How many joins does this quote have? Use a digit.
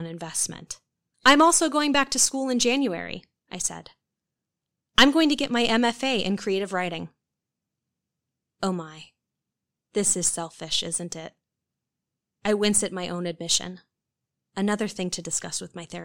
1